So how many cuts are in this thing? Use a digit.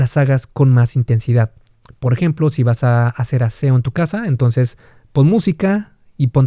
0